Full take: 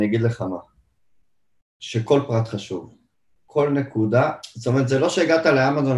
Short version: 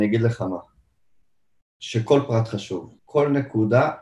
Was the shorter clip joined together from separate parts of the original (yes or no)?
yes